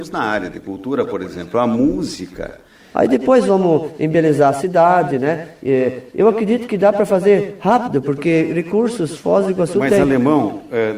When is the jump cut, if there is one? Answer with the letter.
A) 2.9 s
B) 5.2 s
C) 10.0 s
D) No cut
A